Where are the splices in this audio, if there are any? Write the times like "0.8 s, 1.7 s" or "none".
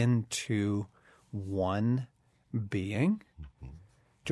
none